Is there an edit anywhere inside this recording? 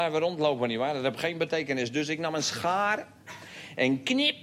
no; 0 cuts

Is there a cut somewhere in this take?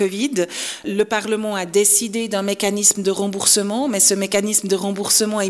no; 0 cuts

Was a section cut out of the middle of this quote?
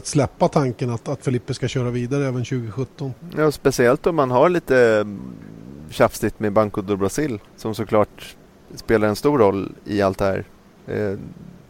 yes; 1 cut; at 7.5 s

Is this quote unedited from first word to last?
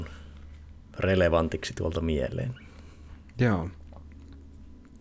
yes; 0 cuts

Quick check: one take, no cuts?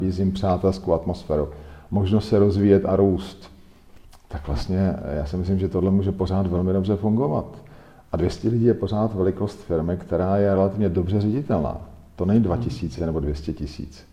yes; 0 cuts

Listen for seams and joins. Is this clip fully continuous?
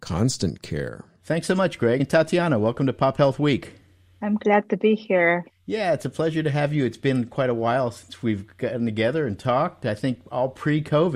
yes; 0 cuts

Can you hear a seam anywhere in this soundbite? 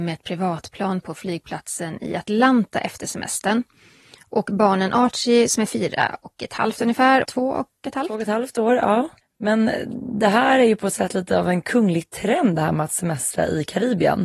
yes; 2 cuts; at 7.2 s, 9.2 s

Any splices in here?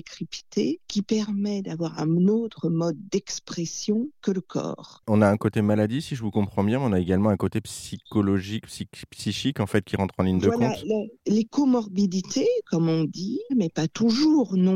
yes; 1 cut; at 13.5 s

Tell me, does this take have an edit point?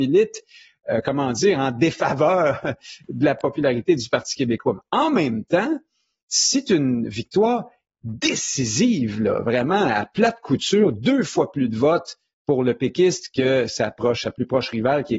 no; 0 cuts

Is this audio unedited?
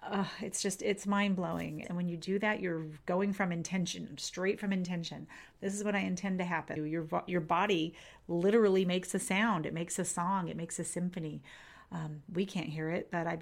no; 2 cuts; at 1.8 s, 6.8 s

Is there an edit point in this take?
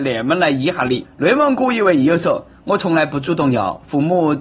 no; 0 cuts

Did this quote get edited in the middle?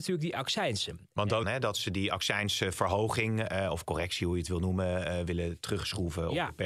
yes; 2 cuts; at 1.4 s, 5.3 s

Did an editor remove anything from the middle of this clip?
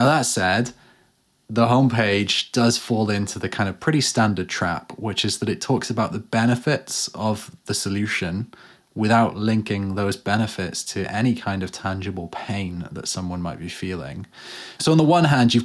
no; 0 cuts

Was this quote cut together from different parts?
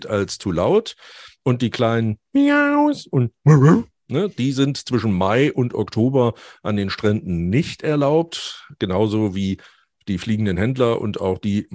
no; 0 cuts

